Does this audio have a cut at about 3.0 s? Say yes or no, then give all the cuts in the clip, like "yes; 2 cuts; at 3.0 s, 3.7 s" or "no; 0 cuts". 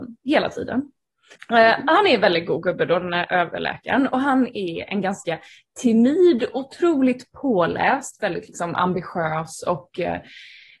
no; 1 cut; at 1.4 s